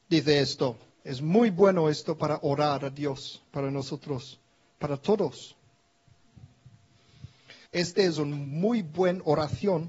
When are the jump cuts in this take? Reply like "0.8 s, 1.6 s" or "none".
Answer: 0.9 s, 7.7 s